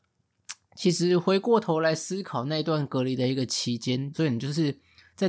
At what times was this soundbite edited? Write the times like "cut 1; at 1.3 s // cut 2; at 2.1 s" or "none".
cut 1; at 4.1 s

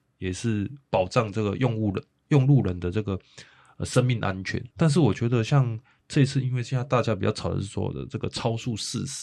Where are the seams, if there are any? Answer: cut 1; at 2.2 s // cut 2; at 4.7 s

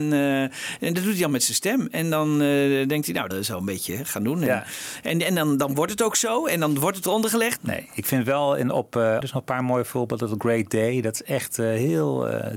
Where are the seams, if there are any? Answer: cut 1; at 3.3 s // cut 2; at 7.6 s // cut 3; at 9.2 s

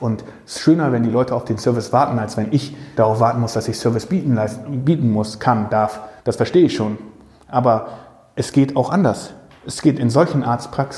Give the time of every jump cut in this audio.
cut 1; at 3.0 s // cut 2; at 6.2 s

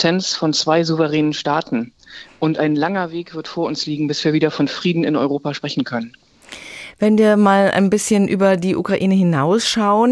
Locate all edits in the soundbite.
none

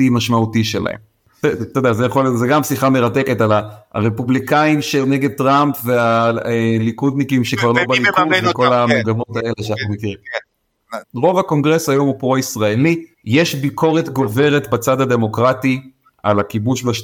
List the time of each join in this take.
cut 1; at 11.0 s // cut 2; at 13.1 s

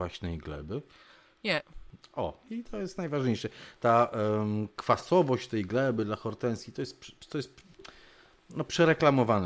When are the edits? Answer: cut 1; at 3.7 s

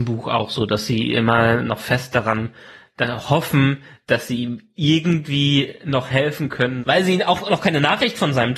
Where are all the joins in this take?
cut 1; at 6.8 s

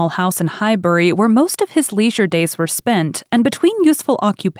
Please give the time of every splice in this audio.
none

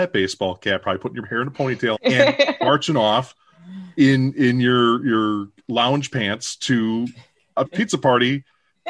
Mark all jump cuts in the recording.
cut 1; at 1.9 s // cut 2; at 7.7 s

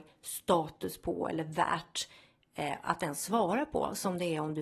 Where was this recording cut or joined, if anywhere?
none

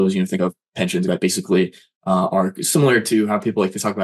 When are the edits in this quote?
cut 1; at 1.1 s

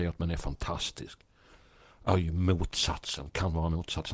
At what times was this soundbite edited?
none

